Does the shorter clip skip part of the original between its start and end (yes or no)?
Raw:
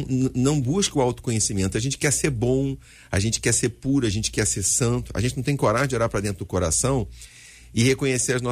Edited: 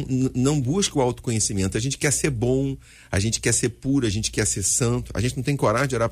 no